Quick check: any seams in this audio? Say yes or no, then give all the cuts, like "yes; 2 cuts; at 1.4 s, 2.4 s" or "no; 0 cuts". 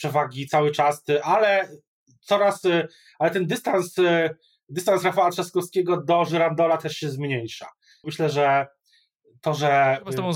yes; 1 cut; at 8.0 s